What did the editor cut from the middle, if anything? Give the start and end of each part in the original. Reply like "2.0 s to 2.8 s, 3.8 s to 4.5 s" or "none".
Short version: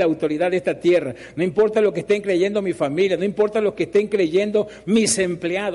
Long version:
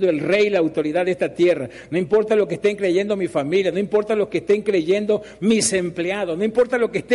none